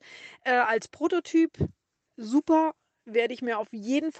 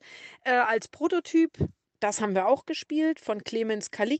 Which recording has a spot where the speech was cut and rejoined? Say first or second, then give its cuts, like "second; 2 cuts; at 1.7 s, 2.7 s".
second; 1 cut; at 1.8 s